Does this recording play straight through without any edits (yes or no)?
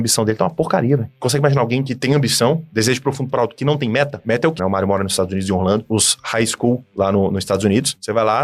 no